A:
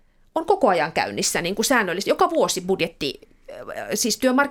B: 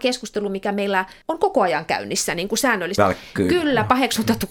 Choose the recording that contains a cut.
B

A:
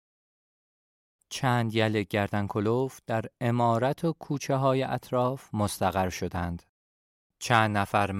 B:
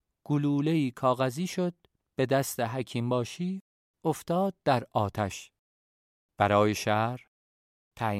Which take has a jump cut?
A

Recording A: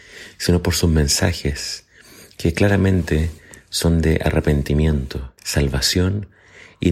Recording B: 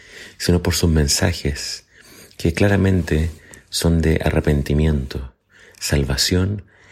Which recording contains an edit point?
A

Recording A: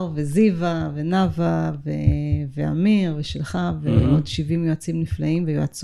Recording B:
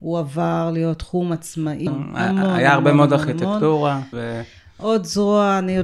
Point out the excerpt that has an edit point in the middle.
B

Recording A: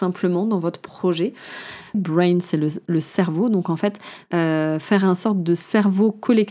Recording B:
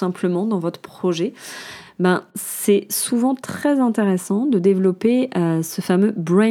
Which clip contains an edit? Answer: A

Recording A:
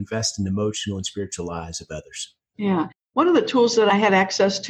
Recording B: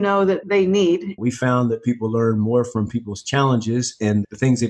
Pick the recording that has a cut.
B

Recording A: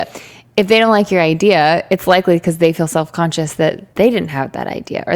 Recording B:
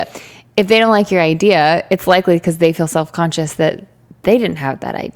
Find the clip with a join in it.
A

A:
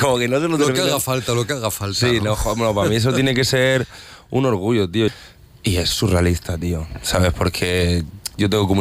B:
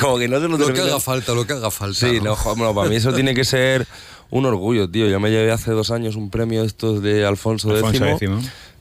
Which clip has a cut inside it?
A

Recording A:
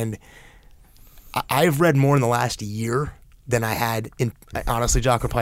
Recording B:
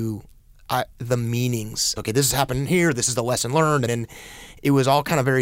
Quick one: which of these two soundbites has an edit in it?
B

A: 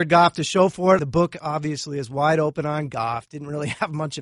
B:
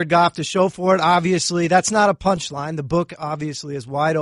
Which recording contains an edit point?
A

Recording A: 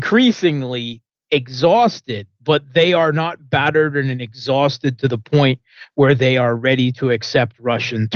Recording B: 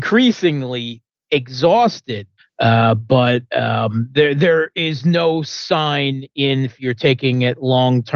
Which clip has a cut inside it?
B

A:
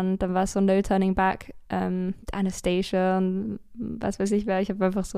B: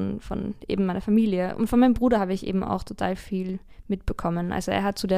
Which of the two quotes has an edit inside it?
A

